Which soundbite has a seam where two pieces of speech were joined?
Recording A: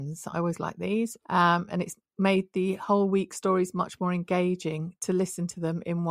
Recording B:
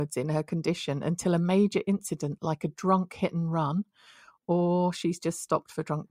A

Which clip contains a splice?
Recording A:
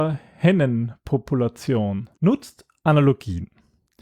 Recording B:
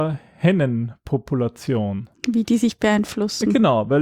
A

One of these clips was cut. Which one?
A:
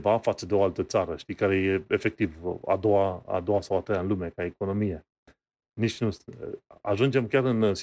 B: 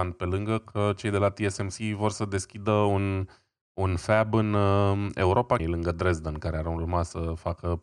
B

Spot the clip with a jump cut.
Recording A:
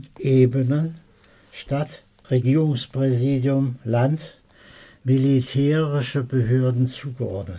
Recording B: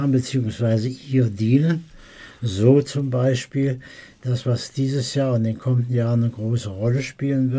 A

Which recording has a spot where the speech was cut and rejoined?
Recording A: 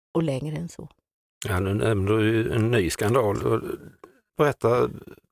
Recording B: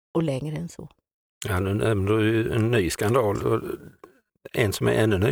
A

